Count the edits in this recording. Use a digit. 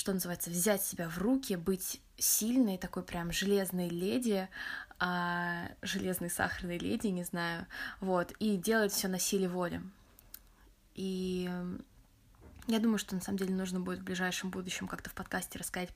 0